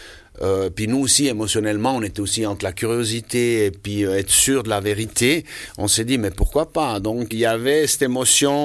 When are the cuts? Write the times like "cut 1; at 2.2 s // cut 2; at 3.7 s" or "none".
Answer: cut 1; at 7.3 s